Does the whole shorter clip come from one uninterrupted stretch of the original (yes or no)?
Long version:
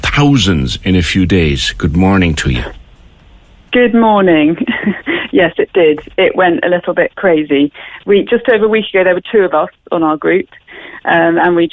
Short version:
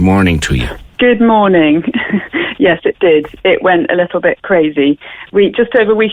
no